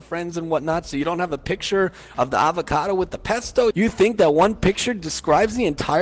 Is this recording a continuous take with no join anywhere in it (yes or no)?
no